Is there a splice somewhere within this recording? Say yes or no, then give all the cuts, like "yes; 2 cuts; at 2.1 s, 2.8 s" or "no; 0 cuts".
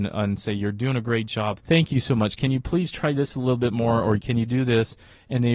yes; 1 cut; at 1.6 s